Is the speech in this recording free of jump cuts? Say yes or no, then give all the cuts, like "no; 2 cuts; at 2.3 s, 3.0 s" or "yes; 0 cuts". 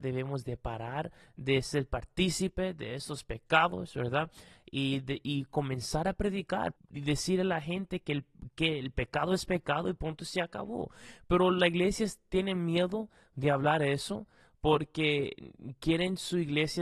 no; 1 cut; at 6.8 s